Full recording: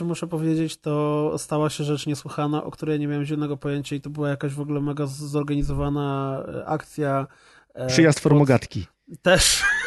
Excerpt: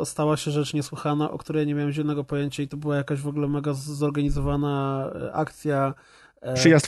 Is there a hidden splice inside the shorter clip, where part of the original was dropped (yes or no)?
no